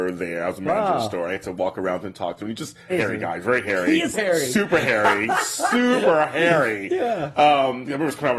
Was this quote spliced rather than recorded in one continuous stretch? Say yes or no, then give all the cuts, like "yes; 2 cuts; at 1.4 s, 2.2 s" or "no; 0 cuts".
yes; 2 cuts; at 2.9 s, 4.1 s